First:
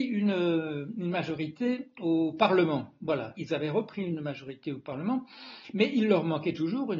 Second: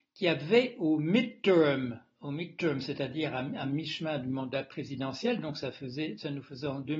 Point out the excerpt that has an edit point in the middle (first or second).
first